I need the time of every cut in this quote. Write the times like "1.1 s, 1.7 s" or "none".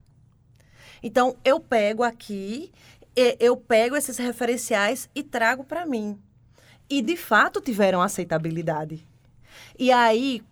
none